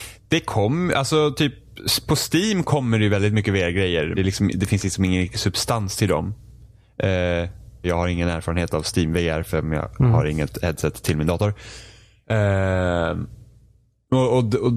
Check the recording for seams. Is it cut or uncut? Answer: cut